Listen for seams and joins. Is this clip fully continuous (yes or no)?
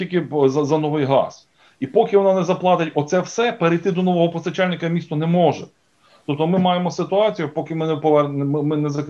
yes